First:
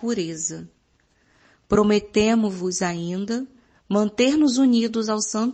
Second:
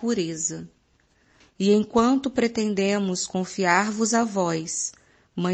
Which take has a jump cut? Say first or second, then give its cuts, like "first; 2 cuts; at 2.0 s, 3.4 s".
second; 1 cut; at 1.4 s